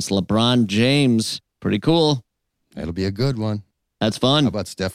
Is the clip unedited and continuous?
yes; 0 cuts

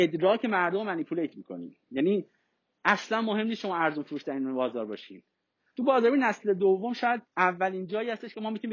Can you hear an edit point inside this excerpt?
yes; 2 cuts; at 5.8 s, 7.3 s

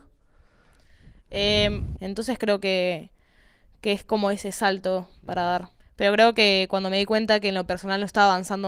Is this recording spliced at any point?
yes; 2 cuts; at 2.0 s, 5.8 s

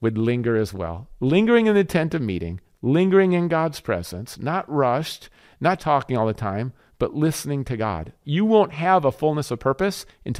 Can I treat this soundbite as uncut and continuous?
no; 2 cuts; at 5.8 s, 8.2 s

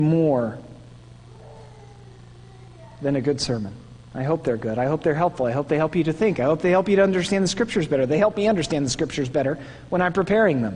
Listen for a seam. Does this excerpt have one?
no; 0 cuts

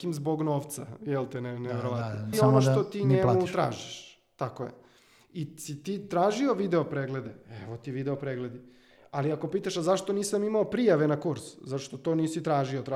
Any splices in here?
yes; 1 cut; at 2.3 s

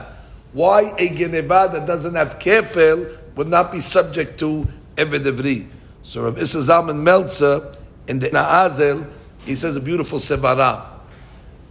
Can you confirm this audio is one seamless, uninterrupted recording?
no; 1 cut; at 8.3 s

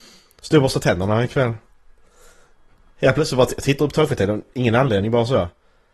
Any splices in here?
no; 0 cuts

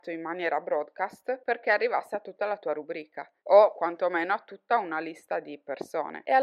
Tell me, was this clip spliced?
yes; 1 cut; at 3.4 s

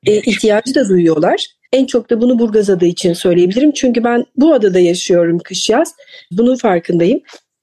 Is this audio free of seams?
no; 2 cuts; at 1.7 s, 6.3 s

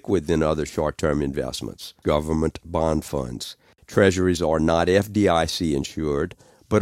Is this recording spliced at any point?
yes; 2 cuts; at 2.0 s, 3.8 s

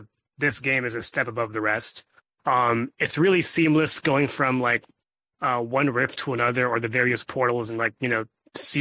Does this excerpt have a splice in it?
yes; 1 cut; at 2.4 s

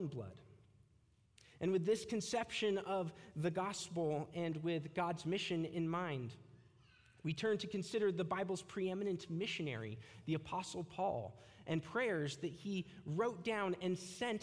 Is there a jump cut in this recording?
no; 0 cuts

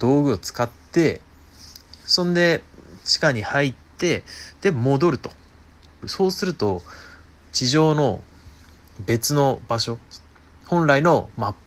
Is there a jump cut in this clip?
yes; 1 cut; at 6.0 s

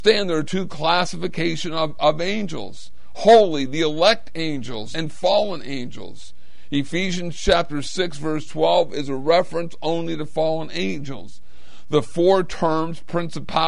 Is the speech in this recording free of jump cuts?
no; 1 cut; at 4.9 s

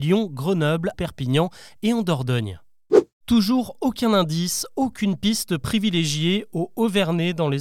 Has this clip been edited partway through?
yes; 1 cut; at 0.9 s

